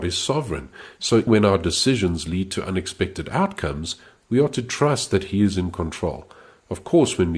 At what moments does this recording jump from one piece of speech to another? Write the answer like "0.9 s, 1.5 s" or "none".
1.3 s